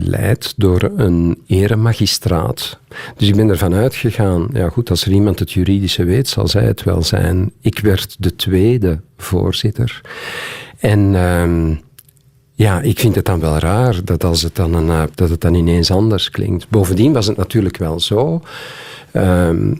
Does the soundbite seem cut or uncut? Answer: cut